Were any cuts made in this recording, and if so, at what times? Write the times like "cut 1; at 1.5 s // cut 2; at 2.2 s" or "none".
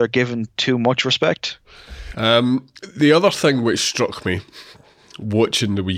cut 1; at 2.1 s